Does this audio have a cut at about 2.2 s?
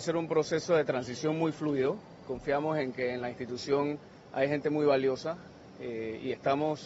yes; 1 cut; at 2.2 s

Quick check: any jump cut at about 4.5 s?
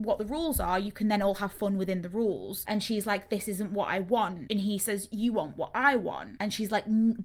no; 1 cut; at 2.6 s

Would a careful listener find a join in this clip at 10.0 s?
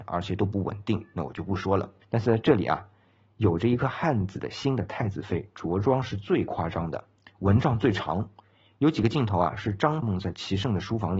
yes; 2 cuts; at 2.0 s, 10.0 s

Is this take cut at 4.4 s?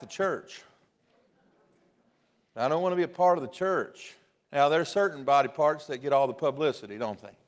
yes; 1 cut; at 4.4 s

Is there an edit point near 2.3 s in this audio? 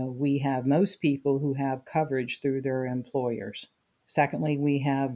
no; 1 cut; at 3.9 s

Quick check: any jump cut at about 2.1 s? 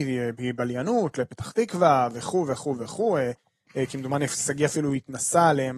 no; 0 cuts

